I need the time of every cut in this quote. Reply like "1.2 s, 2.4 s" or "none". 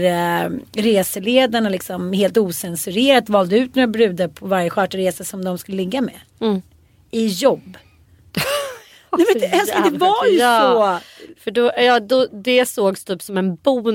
none